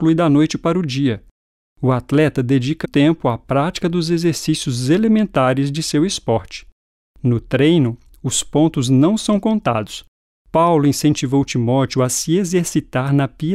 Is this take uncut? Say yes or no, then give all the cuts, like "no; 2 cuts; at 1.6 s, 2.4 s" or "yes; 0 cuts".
no; 2 cuts; at 2.8 s, 10.3 s